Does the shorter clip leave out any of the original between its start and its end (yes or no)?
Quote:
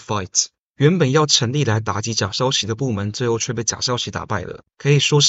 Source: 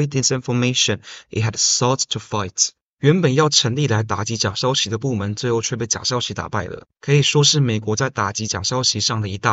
no